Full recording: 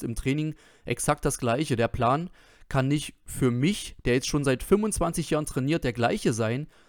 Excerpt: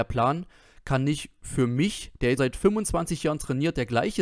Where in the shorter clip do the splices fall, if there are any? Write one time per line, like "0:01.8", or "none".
0:02.4